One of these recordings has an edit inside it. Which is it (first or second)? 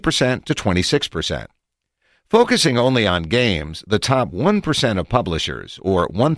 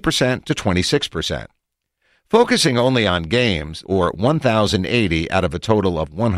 second